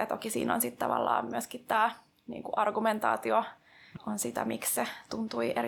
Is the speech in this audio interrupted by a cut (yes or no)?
yes